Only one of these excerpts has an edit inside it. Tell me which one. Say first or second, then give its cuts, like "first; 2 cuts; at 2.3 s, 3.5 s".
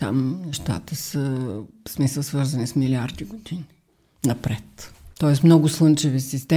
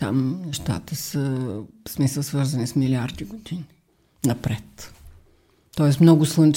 first; 1 cut; at 5.1 s